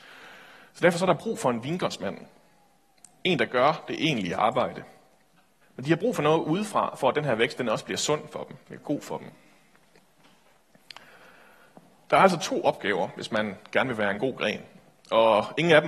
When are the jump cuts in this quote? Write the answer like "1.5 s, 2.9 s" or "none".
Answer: 5.6 s, 8.6 s